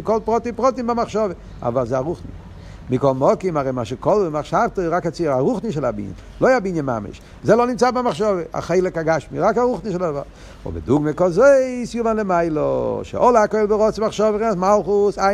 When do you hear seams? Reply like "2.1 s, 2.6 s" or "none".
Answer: 7.4 s

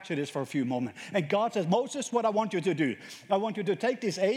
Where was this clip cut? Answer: none

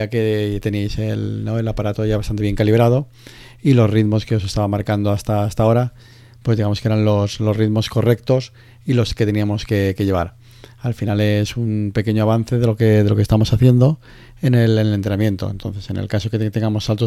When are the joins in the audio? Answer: none

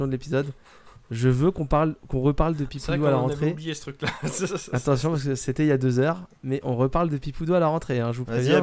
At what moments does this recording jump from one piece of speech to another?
4.5 s

